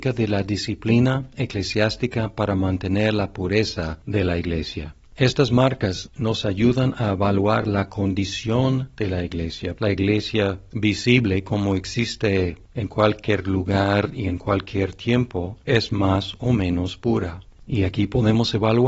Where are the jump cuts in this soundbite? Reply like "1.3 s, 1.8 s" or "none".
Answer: 9.8 s, 17.6 s